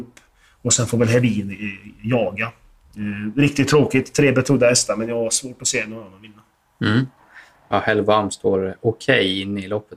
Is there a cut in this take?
no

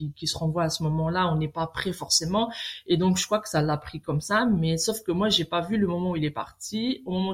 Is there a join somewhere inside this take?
no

